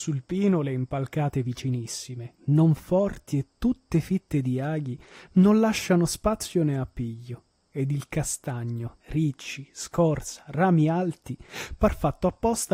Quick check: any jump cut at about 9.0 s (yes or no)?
yes